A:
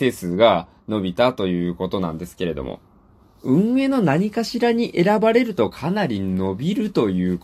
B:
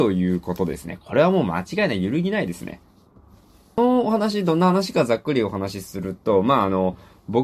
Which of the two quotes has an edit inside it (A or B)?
A